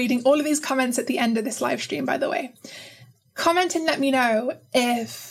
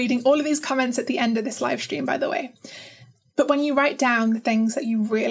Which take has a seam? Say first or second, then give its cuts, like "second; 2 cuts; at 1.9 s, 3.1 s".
second; 1 cut; at 3.3 s